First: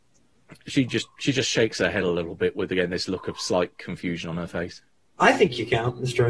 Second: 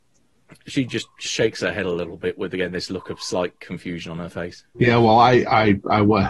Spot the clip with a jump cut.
second; 2 cuts; at 1.3 s, 4.7 s

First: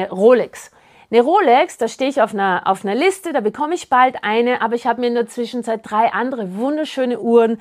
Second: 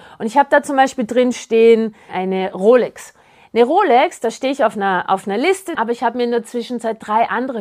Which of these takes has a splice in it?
second; 2 cuts; at 2.1 s, 5.8 s

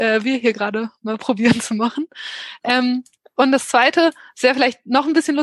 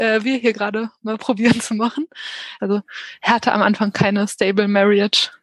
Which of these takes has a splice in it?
second; 1 cut; at 2.6 s

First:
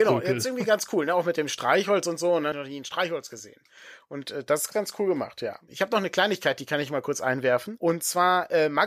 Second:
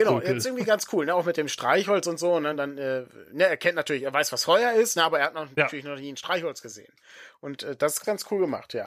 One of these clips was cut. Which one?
first; 1 cut; at 2.5 s

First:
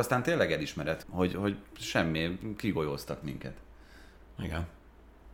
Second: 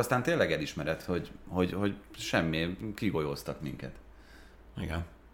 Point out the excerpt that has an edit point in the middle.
first; 1 cut; at 1.0 s

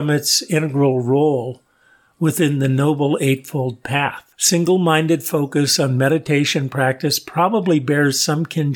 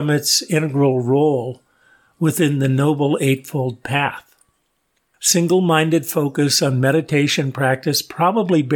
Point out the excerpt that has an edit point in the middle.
first; 1 cut; at 4.3 s

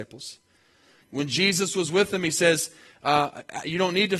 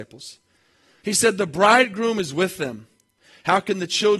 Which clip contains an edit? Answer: first; 1 cut; at 1.0 s

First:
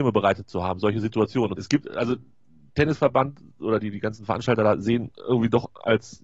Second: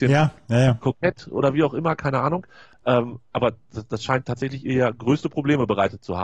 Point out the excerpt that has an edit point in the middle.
first; 1 cut; at 1.5 s

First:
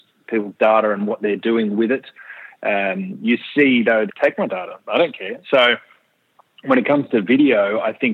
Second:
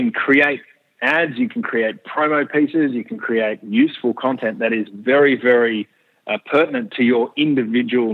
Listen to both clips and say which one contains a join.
first; 2 cuts; at 4.1 s, 5.4 s

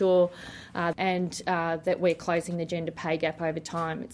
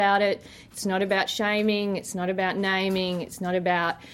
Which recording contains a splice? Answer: first; 1 cut; at 0.9 s

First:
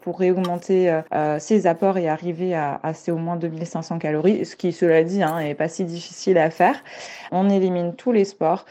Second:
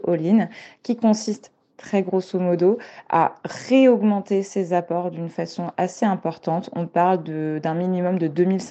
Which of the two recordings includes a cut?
first; 2 cuts; at 1.1 s, 7.3 s

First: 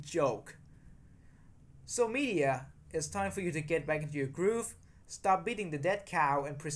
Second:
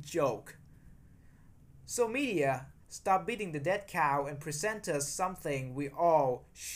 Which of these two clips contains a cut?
second; 1 cut; at 2.8 s

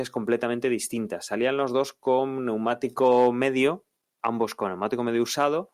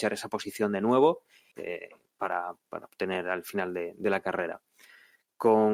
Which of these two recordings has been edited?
second; 2 cuts; at 1.5 s, 2.7 s

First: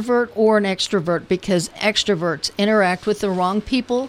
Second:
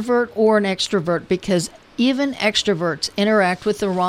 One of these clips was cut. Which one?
first; 1 cut; at 1.8 s

